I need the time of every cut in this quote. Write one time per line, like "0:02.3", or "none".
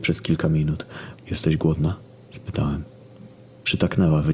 0:01.1